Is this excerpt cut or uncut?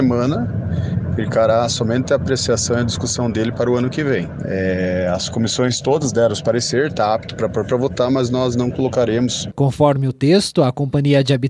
cut